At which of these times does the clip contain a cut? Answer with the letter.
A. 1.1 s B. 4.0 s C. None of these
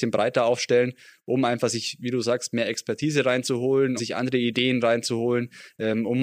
B